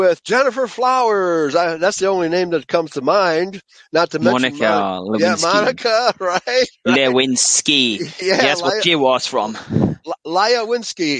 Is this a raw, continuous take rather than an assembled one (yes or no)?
yes